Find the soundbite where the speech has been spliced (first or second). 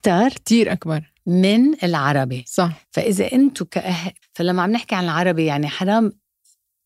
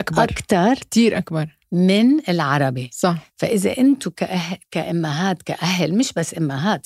first